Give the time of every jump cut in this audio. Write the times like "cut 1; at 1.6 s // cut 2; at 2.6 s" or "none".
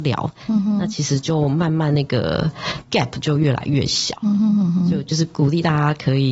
none